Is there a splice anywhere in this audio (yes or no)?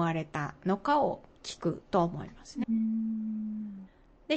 yes